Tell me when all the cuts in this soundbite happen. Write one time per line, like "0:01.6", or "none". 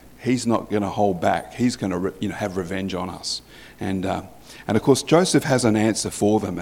none